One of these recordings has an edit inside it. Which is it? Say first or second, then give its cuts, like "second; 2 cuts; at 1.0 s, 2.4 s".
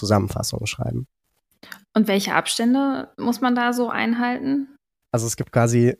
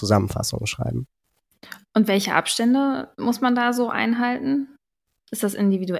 first; 1 cut; at 5.0 s